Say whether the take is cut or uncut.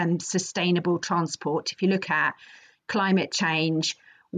uncut